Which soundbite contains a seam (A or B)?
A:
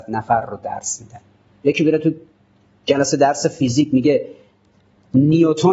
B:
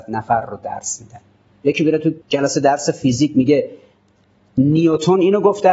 B